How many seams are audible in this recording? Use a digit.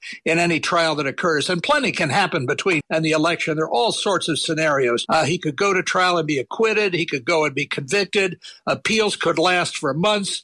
2